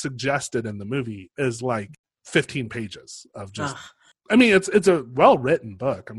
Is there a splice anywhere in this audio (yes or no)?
yes